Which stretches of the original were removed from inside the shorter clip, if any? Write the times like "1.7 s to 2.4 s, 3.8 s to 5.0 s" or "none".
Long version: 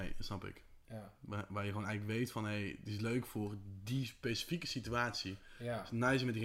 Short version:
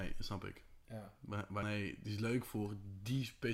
1.6 s to 2.4 s

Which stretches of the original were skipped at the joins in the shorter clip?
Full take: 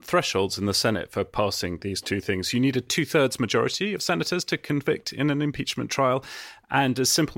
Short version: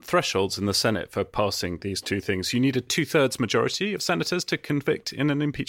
none

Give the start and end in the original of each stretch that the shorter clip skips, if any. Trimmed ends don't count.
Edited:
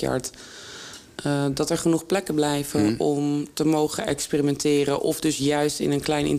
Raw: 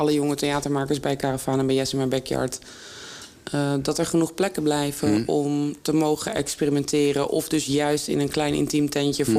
none

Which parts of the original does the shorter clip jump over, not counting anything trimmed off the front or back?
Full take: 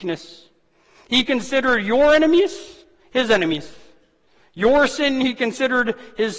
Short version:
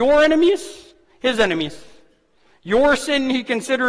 none

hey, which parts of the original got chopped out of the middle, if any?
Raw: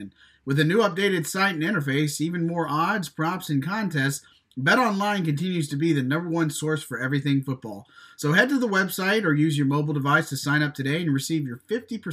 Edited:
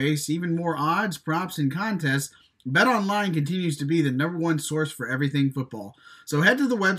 none

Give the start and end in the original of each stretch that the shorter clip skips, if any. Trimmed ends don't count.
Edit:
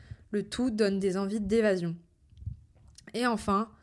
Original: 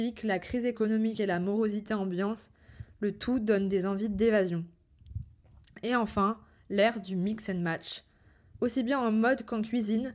none

